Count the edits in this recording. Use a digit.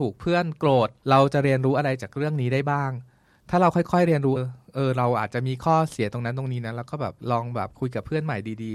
1